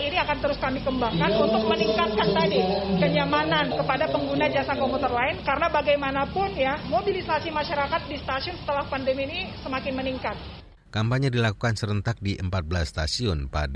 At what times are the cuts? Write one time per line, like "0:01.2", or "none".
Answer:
0:10.9